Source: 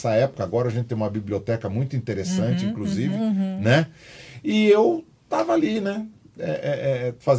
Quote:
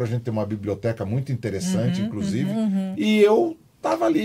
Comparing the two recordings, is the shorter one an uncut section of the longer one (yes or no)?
no